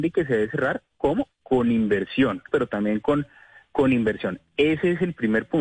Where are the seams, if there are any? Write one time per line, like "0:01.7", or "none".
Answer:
0:02.5